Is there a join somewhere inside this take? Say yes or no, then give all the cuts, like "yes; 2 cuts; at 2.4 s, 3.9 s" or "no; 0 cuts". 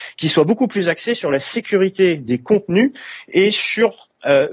no; 0 cuts